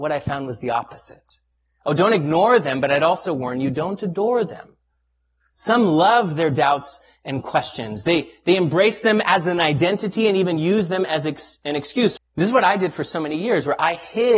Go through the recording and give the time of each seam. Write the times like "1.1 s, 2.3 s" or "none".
12.2 s